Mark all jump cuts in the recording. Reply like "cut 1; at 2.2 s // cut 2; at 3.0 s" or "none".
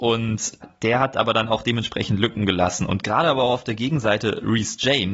none